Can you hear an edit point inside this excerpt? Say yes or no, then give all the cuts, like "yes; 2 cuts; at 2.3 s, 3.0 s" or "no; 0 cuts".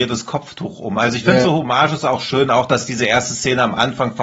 no; 0 cuts